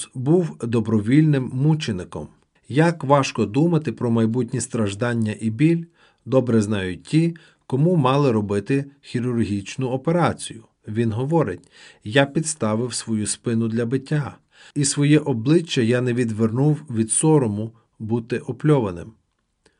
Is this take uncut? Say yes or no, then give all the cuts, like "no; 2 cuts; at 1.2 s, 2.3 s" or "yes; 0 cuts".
no; 3 cuts; at 2.6 s, 10.8 s, 14.7 s